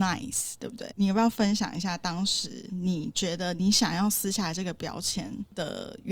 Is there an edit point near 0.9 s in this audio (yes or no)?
yes